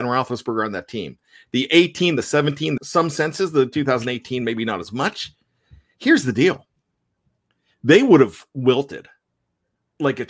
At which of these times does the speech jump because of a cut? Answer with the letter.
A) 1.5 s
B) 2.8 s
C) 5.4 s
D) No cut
B